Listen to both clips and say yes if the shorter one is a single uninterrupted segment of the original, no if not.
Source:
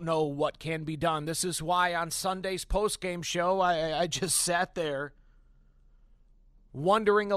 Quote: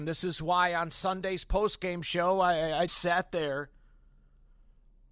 no